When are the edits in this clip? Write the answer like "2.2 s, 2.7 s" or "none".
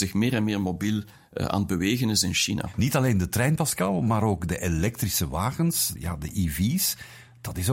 6.0 s